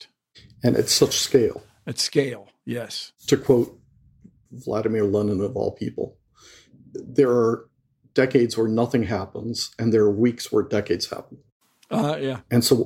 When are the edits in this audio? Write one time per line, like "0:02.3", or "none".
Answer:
none

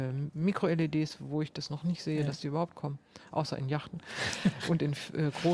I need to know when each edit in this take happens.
none

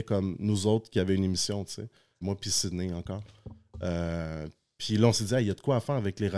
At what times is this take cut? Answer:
0:02.2

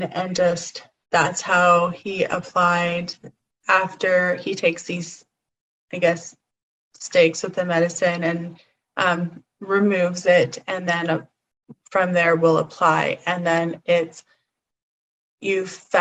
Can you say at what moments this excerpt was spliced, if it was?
none

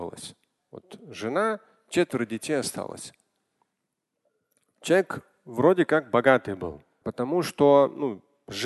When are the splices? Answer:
0:07.0

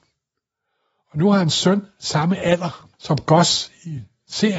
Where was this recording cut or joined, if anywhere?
0:02.9

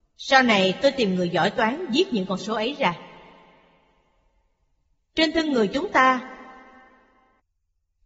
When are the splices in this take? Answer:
none

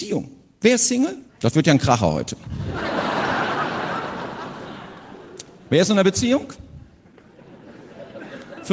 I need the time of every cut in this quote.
0:01.3

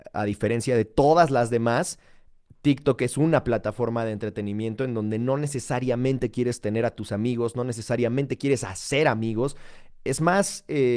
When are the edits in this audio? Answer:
none

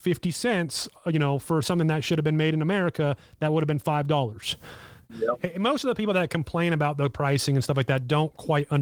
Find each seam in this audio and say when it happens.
0:05.1

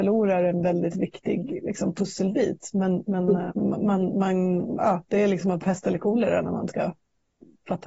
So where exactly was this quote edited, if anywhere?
0:03.5

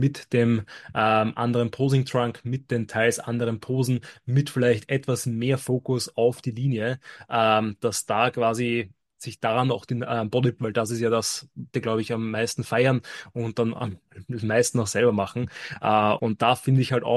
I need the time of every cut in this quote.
0:10.6
0:11.7
0:16.2

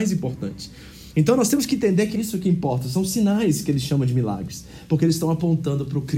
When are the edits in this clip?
0:02.1

